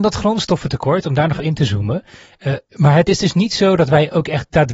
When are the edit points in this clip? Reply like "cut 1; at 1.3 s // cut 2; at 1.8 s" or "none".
cut 1; at 1.4 s // cut 2; at 2.6 s